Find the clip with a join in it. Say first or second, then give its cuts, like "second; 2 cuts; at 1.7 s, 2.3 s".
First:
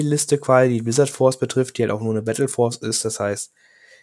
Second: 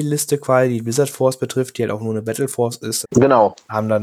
second; 1 cut; at 3.0 s